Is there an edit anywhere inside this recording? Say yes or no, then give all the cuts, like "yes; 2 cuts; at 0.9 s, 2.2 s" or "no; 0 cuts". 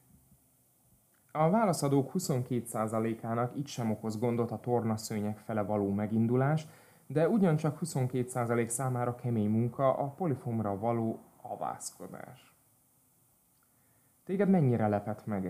yes; 1 cut; at 1.2 s